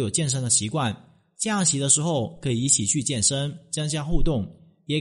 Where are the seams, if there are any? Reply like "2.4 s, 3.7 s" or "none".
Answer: none